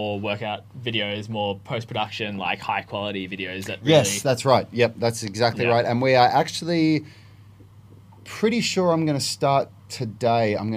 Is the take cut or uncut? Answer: uncut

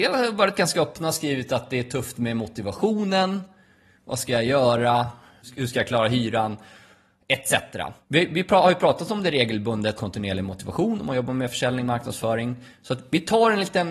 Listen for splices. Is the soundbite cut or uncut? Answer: cut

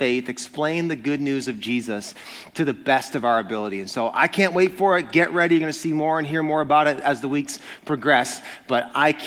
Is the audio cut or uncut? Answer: uncut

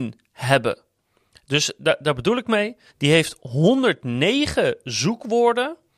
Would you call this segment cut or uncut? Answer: cut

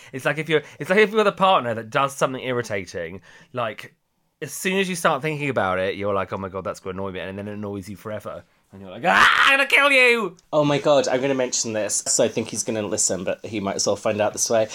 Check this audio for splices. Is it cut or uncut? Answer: cut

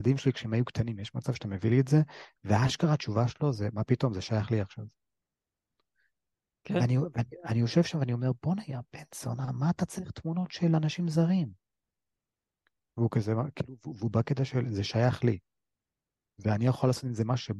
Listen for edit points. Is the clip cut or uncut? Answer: uncut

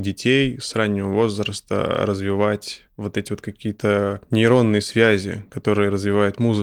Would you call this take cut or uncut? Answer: uncut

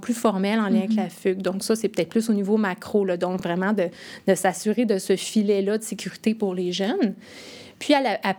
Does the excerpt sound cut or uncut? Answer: uncut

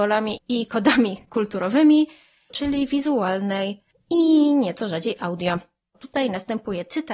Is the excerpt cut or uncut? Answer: cut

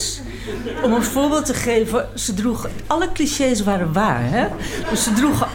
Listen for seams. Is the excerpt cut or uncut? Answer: uncut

